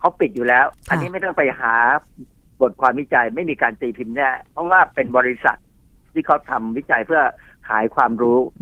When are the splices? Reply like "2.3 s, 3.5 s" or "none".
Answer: none